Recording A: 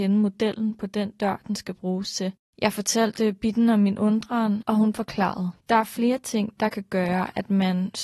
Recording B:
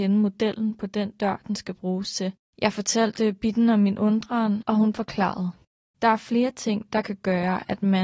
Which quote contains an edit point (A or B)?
A